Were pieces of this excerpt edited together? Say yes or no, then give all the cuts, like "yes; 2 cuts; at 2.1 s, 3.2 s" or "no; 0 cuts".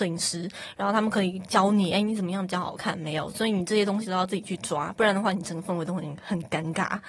no; 0 cuts